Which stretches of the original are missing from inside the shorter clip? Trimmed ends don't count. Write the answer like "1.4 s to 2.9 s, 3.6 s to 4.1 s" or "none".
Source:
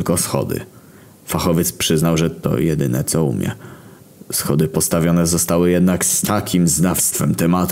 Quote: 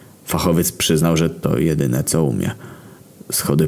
none